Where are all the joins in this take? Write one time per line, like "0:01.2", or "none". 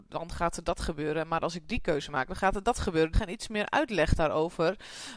0:03.1

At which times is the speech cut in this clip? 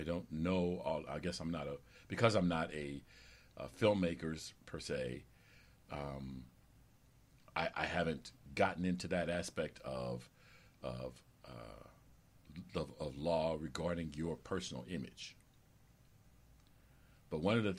none

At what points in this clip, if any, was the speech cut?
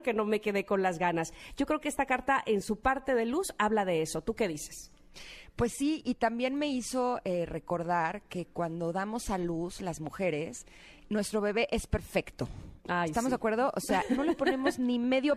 none

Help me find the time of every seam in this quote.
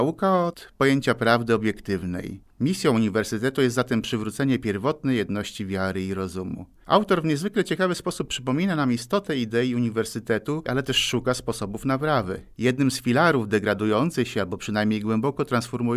0:10.7
0:12.5

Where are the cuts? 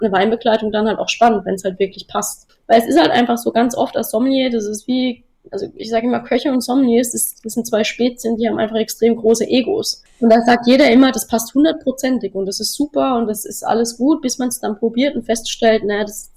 0:02.5

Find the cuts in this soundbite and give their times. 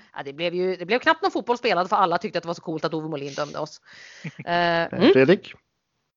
0:04.9

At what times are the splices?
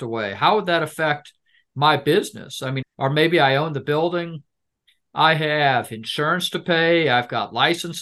0:02.8

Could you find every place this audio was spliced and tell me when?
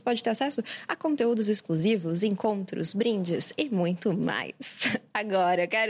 none

